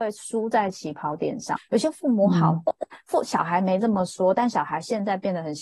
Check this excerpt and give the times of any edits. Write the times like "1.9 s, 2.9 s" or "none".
1.6 s

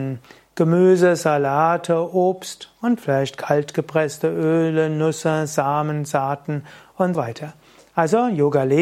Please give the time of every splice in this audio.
7.1 s

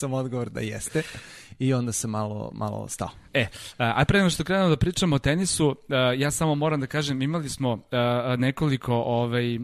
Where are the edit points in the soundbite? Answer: none

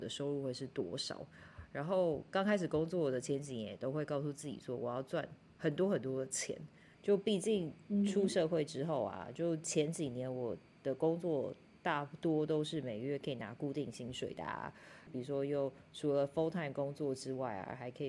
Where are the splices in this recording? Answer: 6.9 s, 15.1 s

